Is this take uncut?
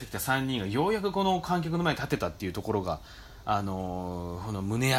yes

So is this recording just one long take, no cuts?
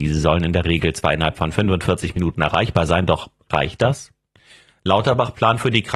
yes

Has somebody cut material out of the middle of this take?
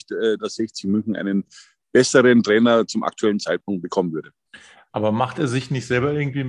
no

